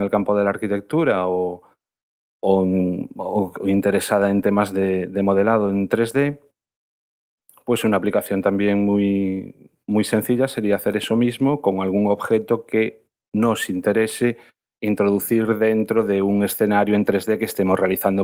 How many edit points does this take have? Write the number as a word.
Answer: zero